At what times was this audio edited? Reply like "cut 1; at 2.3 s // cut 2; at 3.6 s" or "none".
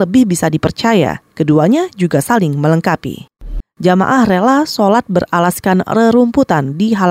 cut 1; at 3.6 s